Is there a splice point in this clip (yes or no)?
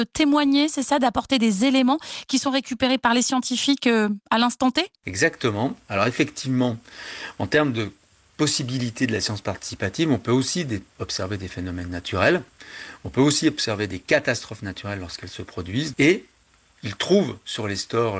yes